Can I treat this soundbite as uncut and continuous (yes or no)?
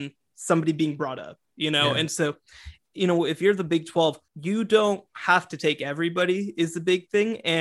no